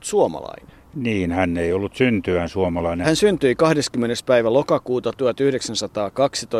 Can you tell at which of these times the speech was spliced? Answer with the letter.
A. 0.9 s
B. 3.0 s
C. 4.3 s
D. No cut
B